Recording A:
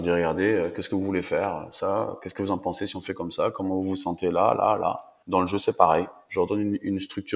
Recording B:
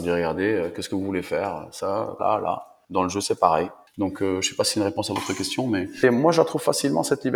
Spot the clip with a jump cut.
B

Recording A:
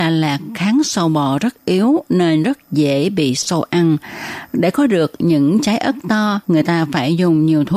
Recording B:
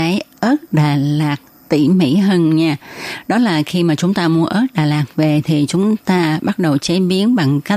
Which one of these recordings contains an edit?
A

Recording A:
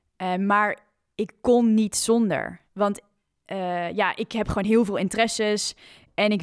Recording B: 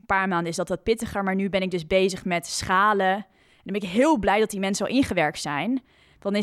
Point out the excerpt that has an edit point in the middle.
A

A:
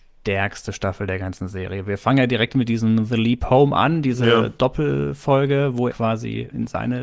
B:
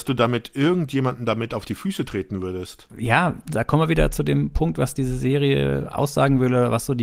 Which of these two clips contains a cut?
A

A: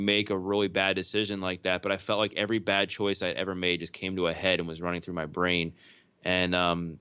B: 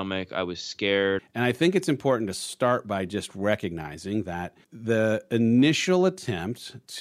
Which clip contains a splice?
B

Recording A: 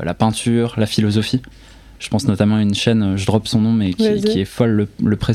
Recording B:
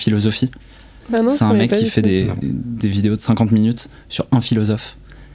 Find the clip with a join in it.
B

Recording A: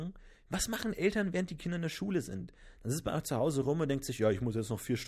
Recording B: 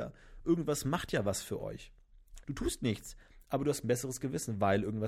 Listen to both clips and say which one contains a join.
B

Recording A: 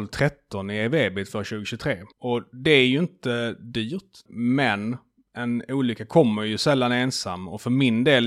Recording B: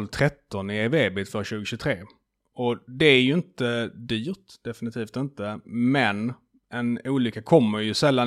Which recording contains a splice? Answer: A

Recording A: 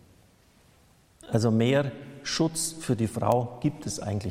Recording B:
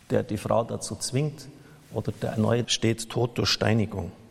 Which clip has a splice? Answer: B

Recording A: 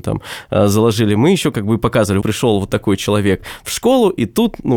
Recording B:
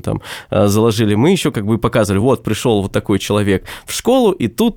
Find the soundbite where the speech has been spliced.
A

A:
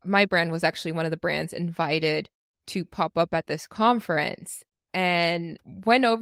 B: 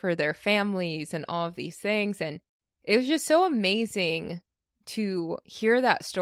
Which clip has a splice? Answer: A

